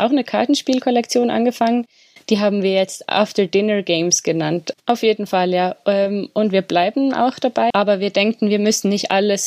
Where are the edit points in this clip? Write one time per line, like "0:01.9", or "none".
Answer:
0:04.7
0:07.7